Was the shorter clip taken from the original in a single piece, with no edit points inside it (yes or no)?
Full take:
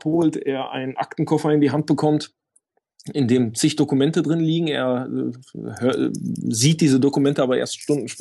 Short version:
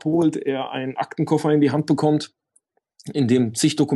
yes